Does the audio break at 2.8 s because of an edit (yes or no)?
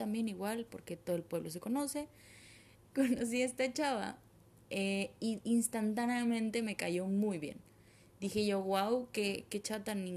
yes